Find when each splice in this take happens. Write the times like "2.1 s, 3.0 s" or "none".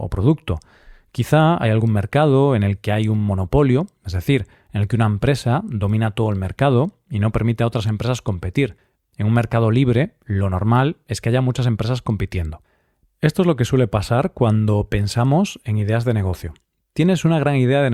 9.1 s